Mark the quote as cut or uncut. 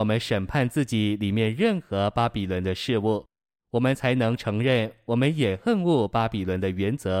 uncut